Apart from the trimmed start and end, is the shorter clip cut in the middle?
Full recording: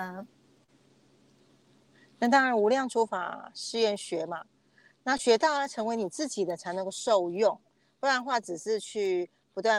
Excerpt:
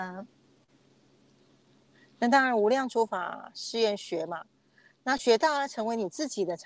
no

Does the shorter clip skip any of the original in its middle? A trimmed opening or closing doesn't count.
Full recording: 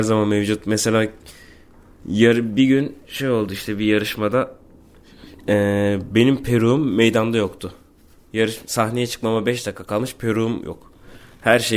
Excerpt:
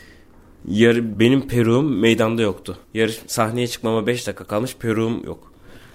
yes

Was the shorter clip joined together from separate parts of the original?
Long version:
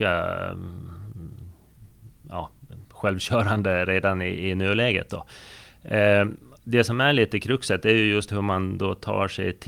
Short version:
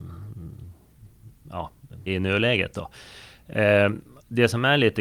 yes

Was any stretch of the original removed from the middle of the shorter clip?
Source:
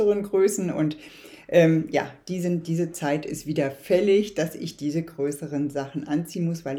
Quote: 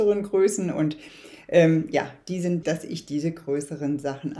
yes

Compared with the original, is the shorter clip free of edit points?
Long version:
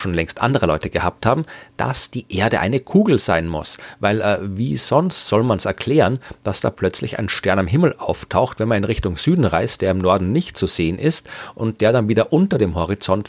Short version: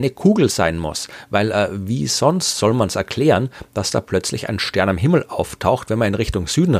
yes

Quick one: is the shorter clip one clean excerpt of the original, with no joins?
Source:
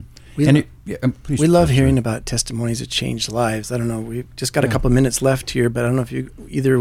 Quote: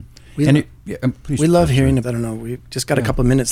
no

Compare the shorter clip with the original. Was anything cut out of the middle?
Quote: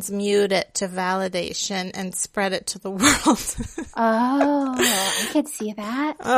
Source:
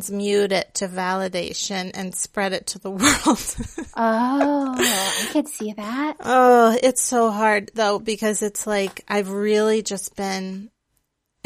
no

